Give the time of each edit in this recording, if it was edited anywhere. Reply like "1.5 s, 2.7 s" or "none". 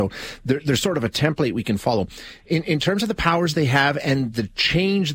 none